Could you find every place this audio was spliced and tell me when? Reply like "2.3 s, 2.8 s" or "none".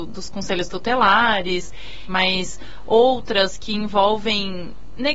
2.1 s